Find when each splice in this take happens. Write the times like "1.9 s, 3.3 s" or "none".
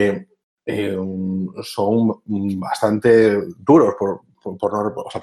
none